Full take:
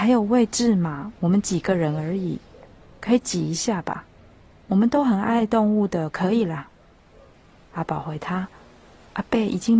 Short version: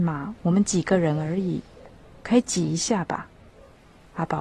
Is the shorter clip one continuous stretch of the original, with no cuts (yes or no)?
no